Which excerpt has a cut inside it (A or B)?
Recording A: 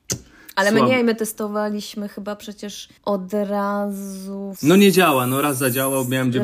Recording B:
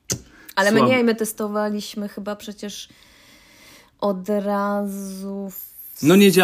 A